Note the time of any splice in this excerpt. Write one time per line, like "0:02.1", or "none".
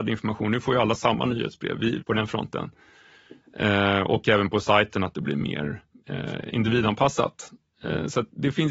0:02.0